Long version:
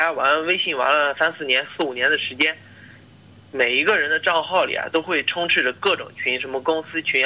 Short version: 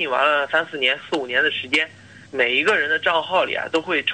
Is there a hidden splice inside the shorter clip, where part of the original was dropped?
yes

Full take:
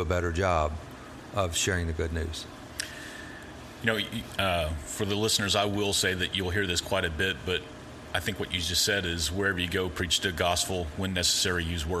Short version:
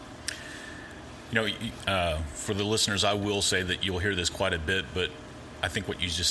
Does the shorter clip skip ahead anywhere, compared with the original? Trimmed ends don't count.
no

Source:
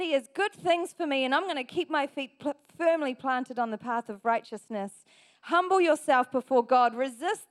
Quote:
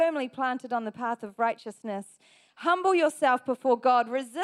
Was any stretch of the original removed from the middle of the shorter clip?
no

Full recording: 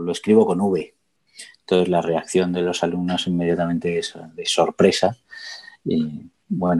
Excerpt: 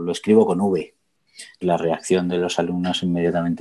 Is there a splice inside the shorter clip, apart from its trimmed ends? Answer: yes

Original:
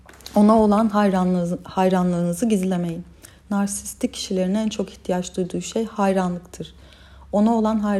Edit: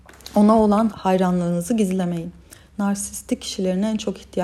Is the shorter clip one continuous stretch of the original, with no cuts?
no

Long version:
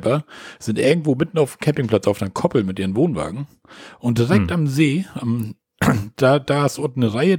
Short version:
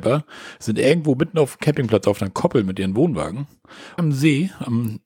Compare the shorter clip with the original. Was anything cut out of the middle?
yes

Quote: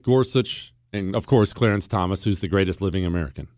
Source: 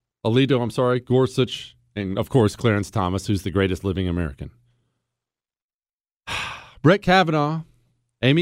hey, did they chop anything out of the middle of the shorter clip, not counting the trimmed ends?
no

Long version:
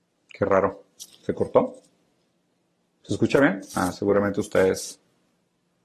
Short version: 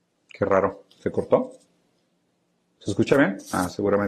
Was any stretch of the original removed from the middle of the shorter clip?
yes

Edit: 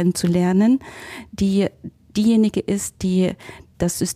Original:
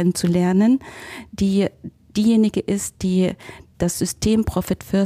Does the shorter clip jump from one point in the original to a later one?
no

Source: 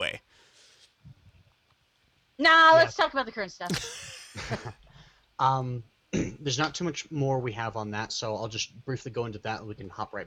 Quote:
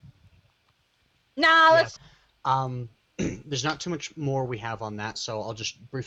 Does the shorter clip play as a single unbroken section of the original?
no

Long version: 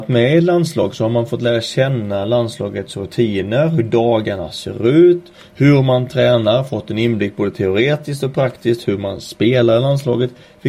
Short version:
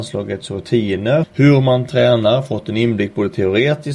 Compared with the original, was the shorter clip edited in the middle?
yes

